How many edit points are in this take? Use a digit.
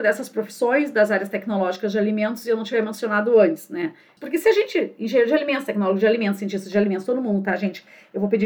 1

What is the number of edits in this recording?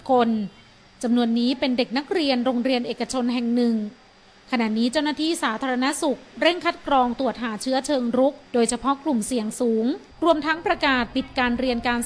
2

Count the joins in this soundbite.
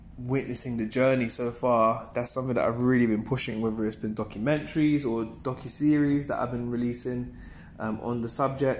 0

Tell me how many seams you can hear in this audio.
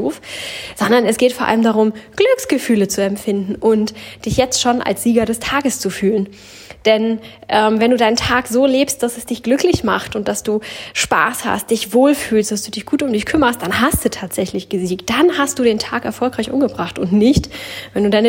0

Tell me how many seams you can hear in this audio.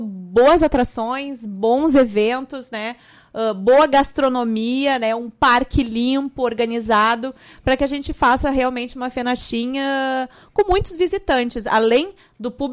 0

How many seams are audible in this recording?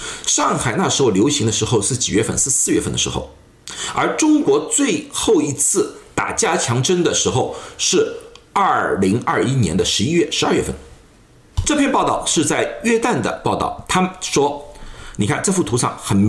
2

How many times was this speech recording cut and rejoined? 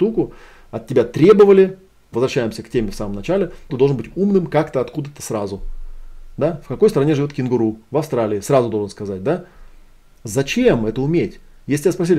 2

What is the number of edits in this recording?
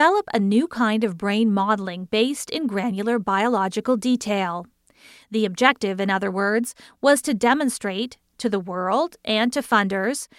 0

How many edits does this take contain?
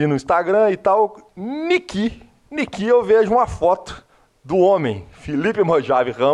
0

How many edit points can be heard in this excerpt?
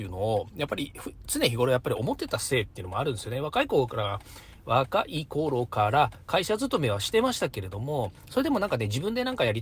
0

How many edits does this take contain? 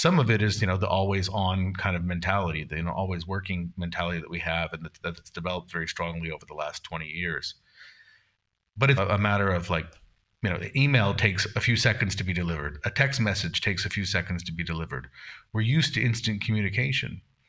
1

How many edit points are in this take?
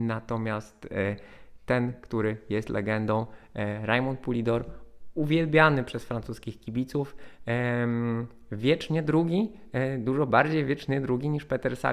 0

